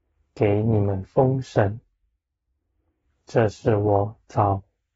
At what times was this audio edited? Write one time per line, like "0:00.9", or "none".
none